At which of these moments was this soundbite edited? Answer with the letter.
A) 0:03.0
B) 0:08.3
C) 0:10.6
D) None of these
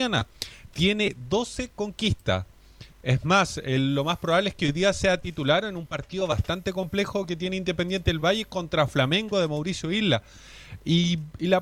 D